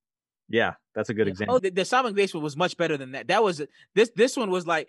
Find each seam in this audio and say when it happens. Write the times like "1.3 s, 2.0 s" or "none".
1.6 s